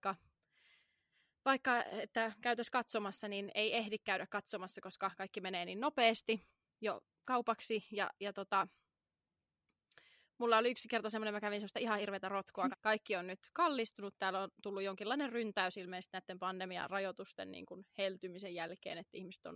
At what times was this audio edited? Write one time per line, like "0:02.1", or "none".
0:12.7